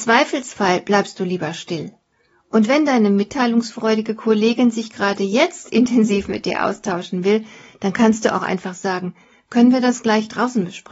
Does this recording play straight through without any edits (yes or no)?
yes